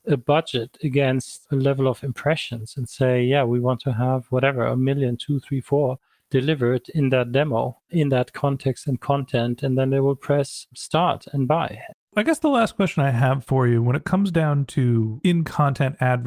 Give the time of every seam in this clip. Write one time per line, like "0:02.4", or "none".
0:11.9